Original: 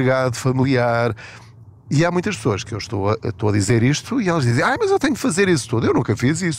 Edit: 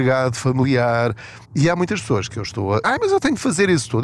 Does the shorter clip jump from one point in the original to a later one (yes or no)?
yes